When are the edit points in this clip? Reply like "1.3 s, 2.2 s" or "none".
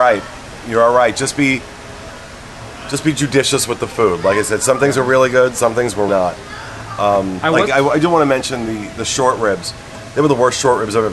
6.1 s, 7.7 s